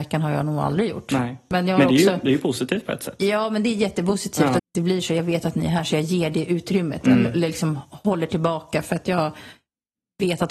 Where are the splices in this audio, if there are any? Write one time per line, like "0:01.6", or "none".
0:04.6